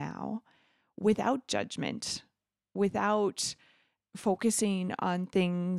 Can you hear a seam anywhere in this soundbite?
no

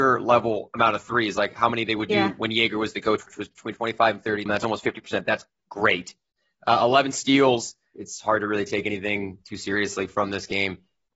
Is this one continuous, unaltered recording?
no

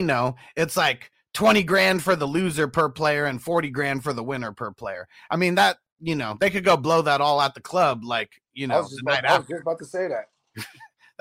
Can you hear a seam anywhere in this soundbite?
no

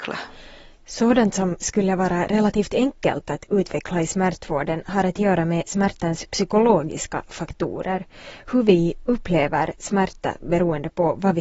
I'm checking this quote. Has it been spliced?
no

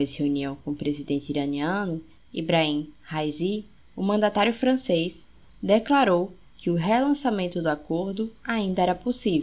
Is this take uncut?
no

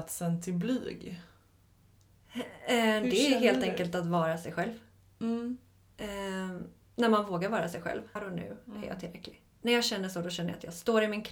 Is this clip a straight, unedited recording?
no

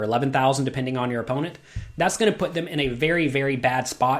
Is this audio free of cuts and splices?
yes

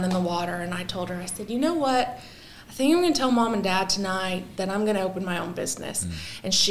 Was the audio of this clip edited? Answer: no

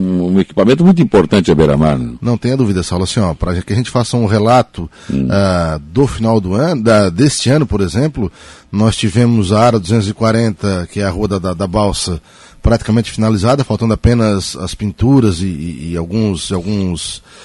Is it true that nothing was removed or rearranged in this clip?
yes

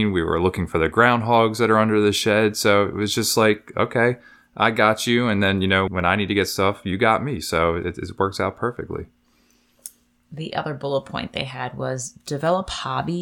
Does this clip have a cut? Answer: yes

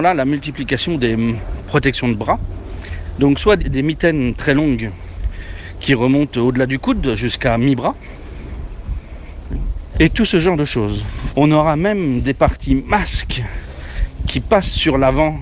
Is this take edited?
yes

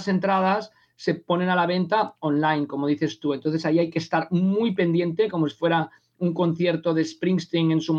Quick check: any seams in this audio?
no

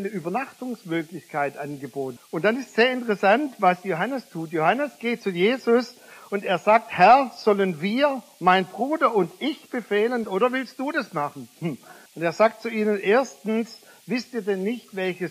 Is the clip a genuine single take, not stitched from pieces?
no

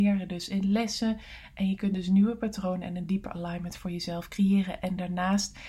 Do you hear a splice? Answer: no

